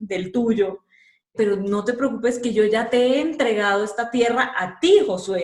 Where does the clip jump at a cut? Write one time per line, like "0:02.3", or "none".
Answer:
0:01.3